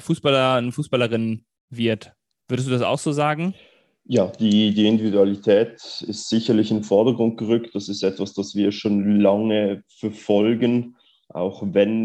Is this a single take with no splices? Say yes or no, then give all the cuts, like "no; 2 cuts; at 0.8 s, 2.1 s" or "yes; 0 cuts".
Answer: yes; 0 cuts